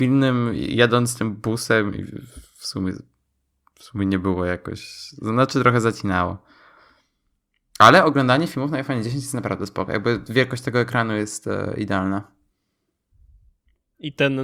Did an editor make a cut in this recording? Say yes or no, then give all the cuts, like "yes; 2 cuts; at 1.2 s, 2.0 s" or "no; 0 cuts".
no; 0 cuts